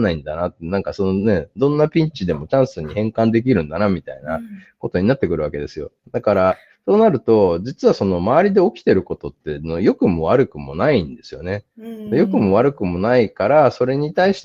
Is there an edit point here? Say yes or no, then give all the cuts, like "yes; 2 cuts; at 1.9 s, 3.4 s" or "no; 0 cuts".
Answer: no; 0 cuts